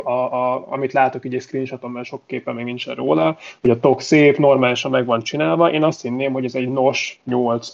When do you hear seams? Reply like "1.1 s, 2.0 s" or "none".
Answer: none